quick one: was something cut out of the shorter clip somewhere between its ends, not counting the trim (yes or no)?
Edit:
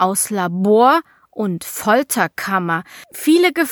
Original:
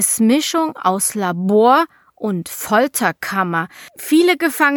no